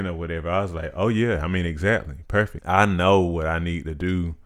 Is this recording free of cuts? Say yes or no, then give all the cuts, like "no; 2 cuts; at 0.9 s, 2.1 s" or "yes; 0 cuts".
no; 1 cut; at 2.6 s